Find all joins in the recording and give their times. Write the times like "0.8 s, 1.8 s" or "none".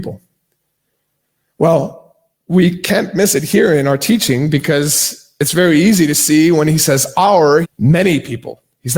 7.6 s